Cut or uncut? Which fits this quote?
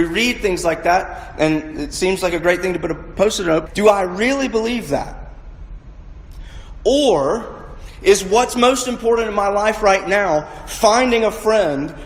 cut